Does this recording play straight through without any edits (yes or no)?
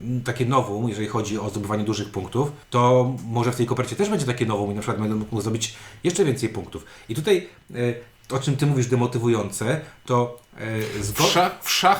no